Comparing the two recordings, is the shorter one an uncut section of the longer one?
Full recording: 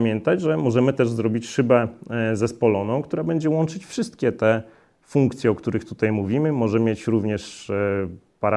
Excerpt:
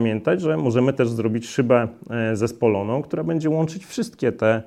yes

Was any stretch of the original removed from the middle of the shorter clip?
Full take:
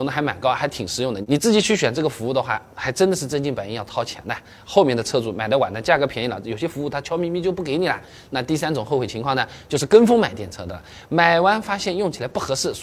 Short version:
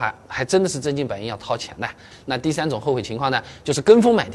yes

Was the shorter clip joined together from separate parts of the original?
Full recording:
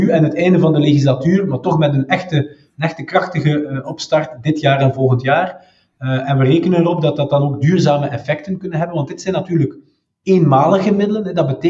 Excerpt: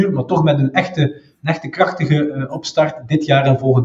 no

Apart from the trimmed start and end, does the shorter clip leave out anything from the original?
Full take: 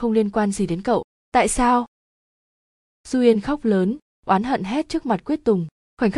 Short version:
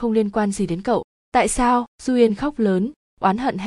yes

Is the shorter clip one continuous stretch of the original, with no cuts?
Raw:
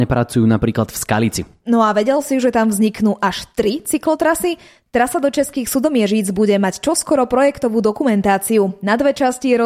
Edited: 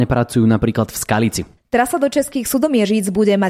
no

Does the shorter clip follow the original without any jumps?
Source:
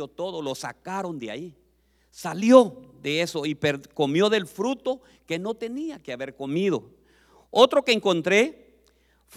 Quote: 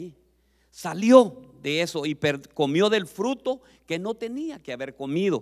yes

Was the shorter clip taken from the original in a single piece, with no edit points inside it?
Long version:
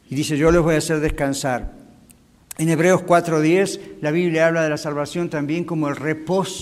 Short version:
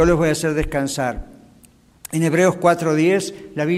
yes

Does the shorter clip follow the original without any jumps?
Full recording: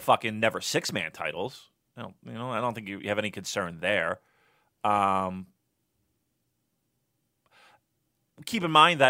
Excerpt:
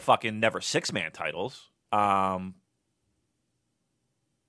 no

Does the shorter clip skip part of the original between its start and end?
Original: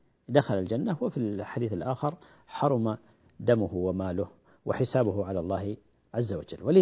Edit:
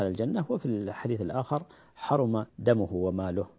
yes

